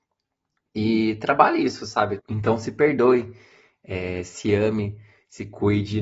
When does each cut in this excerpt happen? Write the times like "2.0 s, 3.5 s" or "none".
2.2 s